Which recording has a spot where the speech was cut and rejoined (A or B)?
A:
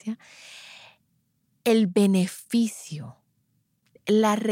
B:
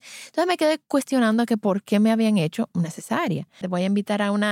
B